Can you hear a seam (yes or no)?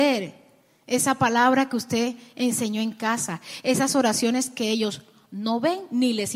no